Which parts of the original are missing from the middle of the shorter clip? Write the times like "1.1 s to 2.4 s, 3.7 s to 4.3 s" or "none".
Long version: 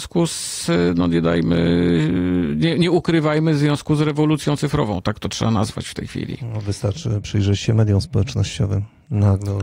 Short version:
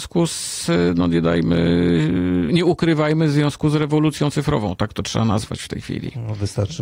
2.5 s to 2.7 s